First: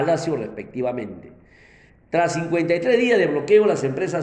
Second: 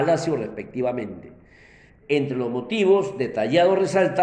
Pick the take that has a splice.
second; 1 cut; at 2.0 s

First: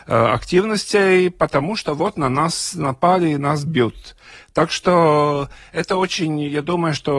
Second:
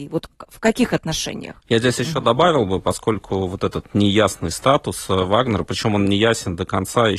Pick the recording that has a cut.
second; 1 cut; at 1.6 s

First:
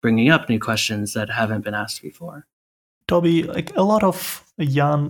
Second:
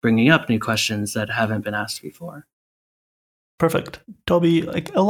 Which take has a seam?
first; 1 cut; at 3.0 s

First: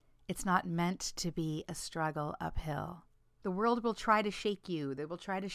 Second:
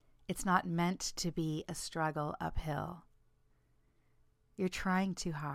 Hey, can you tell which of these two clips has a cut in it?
first; 1 cut; at 3.4 s

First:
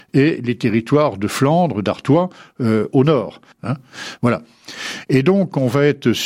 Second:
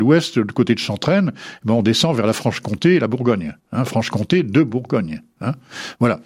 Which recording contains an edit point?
first; 1 cut; at 3.5 s

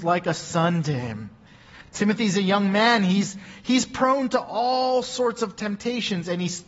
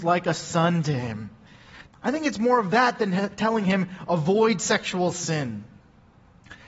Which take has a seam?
second; 1 cut; at 1.9 s

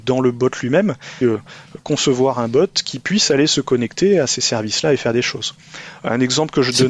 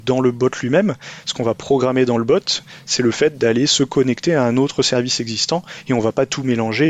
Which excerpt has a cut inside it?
first; 1 cut; at 1.2 s

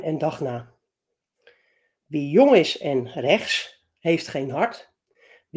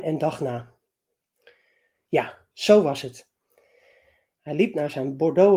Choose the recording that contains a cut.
second; 1 cut; at 1.9 s

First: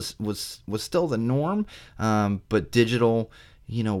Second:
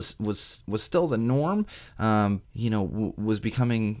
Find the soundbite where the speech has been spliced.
second; 1 cut; at 2.4 s

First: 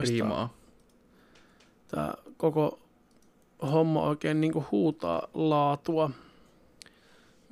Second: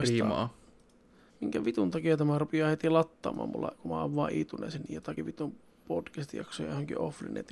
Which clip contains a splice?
second; 1 cut; at 1.3 s

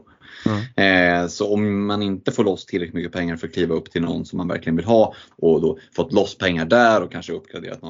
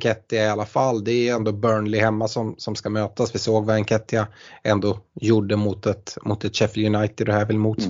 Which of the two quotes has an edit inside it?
first; 1 cut; at 5.3 s

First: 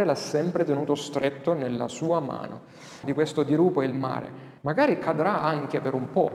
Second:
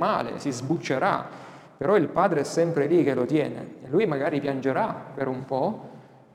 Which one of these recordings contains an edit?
first; 2 cuts; at 3.0 s, 4.6 s

